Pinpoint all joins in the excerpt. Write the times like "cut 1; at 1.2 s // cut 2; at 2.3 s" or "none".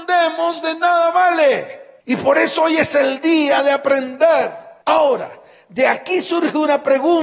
none